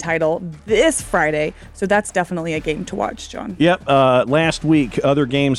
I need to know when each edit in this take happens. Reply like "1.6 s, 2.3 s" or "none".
none